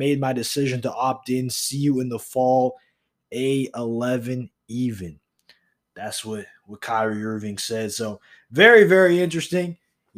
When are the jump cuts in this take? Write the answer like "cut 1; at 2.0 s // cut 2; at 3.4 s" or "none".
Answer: none

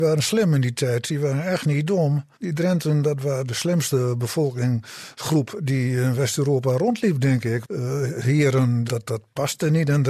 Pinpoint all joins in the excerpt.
cut 1; at 2.3 s // cut 2; at 7.6 s // cut 3; at 8.9 s

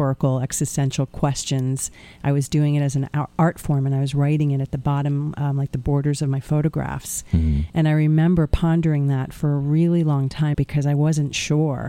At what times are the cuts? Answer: cut 1; at 7.7 s // cut 2; at 10.5 s

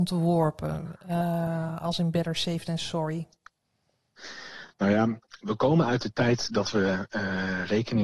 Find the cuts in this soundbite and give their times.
none

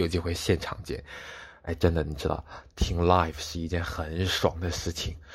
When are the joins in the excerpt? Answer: none

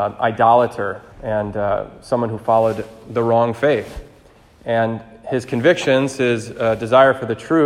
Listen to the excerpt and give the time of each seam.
cut 1; at 1.1 s

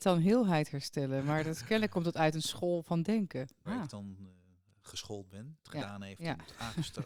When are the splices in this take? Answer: cut 1; at 3.7 s // cut 2; at 5.6 s

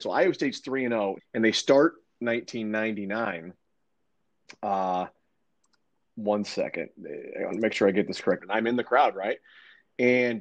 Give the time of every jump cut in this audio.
cut 1; at 1.2 s // cut 2; at 8.4 s

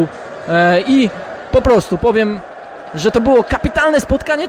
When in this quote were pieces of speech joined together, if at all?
none

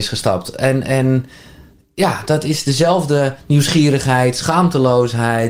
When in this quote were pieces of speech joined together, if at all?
none

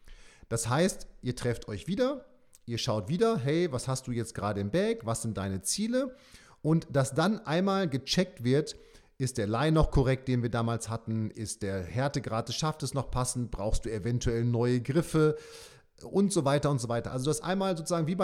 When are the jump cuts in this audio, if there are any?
cut 1; at 11.3 s

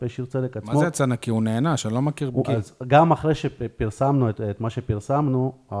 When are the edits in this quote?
cut 1; at 2.4 s

